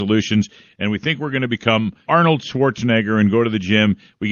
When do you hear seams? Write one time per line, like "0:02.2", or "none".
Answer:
0:02.1